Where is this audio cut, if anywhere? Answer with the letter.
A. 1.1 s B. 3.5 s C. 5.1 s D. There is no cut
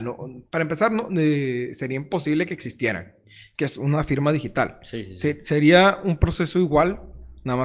B